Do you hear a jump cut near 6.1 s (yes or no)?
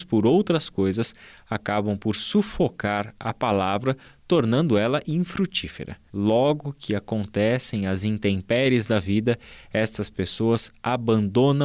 yes